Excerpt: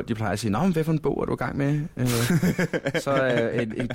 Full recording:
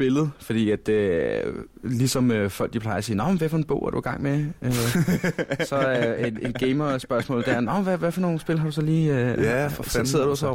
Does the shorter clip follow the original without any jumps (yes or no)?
yes